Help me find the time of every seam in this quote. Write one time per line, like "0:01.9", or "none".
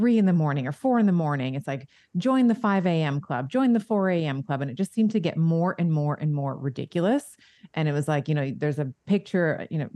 none